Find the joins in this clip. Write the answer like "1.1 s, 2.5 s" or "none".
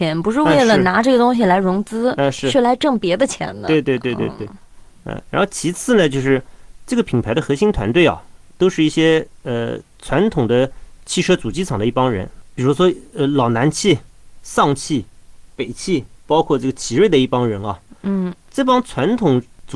none